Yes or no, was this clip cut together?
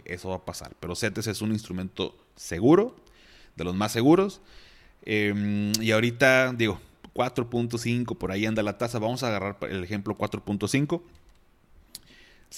no